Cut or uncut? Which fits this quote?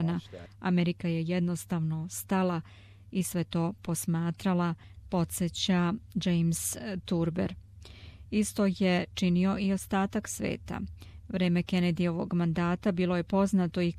uncut